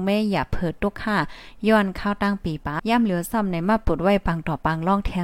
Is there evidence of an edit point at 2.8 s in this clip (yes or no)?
yes